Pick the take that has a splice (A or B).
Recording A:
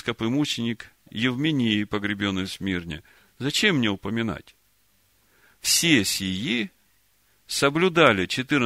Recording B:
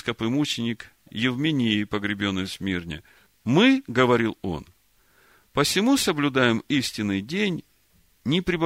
B